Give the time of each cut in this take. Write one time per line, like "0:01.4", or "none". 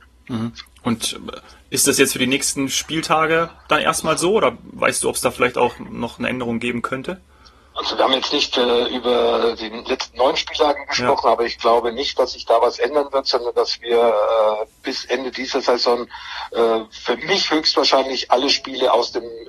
none